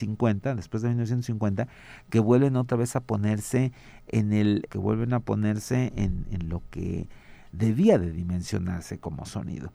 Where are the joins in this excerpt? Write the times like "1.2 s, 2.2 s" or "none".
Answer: 4.7 s

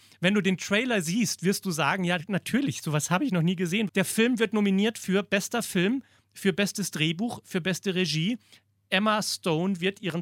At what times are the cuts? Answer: 3.9 s

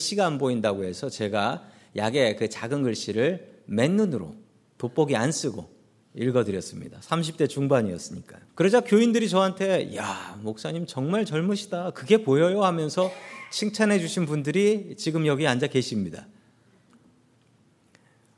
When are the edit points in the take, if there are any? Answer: 8.5 s

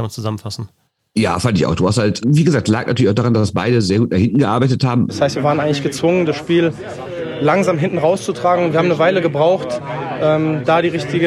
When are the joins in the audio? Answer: 2.2 s, 5.1 s

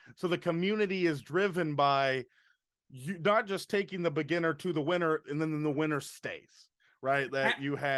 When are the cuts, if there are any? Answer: none

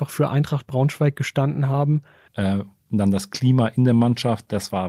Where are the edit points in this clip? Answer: 2.3 s

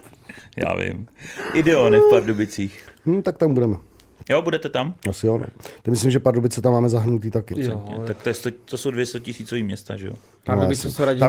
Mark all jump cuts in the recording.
7.5 s

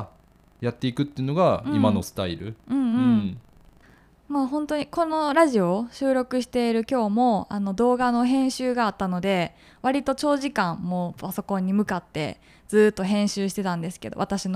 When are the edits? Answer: none

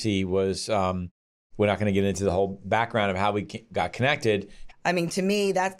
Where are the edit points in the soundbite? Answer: 4.7 s

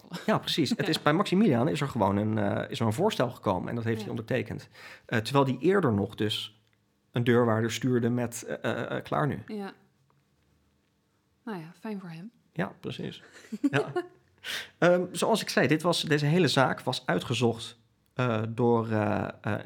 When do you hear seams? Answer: none

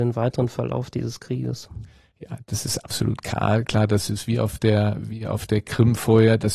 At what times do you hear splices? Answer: none

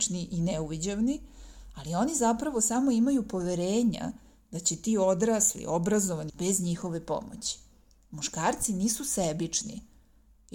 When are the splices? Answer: 6.3 s

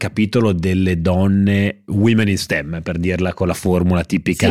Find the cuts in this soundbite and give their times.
1.9 s

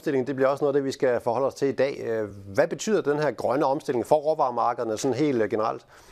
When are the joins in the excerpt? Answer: none

